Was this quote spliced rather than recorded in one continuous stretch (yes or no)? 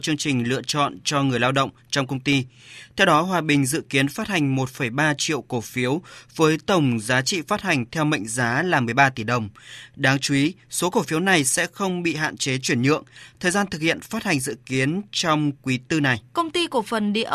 yes